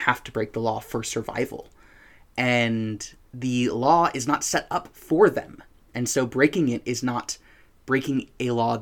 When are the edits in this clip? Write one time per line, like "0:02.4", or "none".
none